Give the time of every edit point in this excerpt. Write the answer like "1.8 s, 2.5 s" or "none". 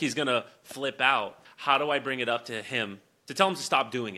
1.4 s

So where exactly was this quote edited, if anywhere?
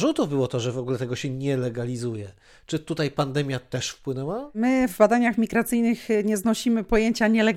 none

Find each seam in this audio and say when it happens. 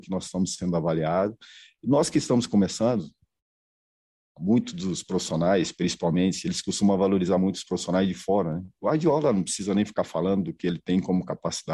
none

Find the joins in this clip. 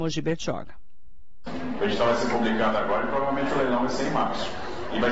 1.8 s

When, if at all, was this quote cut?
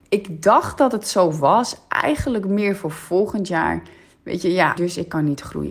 4.8 s

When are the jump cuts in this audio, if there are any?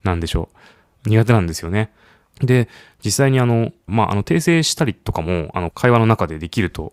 2.2 s, 3.9 s, 5.7 s

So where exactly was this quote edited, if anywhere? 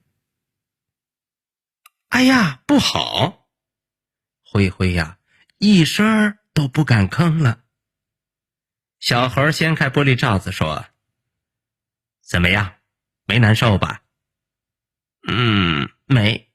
4.3 s

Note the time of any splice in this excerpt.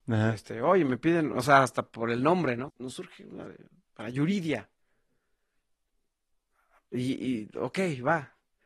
2.7 s

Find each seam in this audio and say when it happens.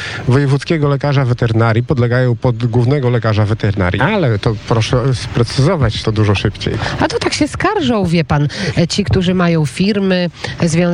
4.0 s, 6.0 s

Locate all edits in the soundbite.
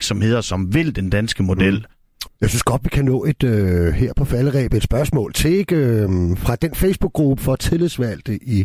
2.3 s, 6.4 s

